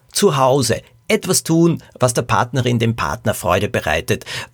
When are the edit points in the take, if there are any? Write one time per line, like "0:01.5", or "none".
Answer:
none